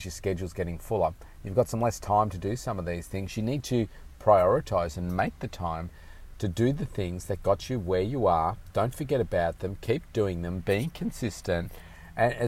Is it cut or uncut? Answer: uncut